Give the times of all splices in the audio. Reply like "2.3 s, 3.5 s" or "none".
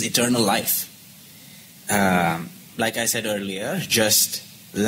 2.7 s

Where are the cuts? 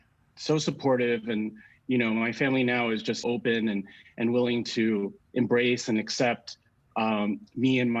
3.2 s

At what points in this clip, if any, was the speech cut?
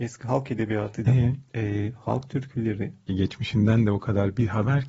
1.1 s, 3.1 s

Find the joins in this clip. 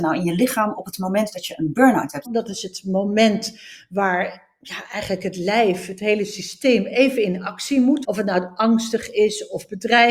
2.2 s, 8.0 s

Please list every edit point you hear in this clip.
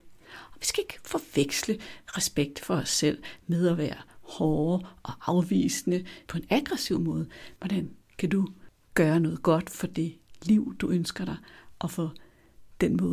6.3 s, 7.6 s

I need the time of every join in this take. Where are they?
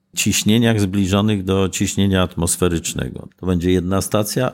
3.3 s

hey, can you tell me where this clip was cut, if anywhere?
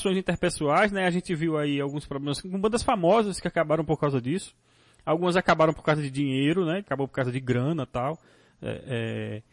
6.8 s

